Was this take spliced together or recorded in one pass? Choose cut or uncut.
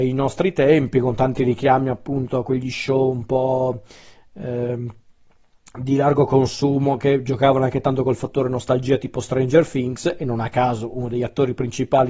uncut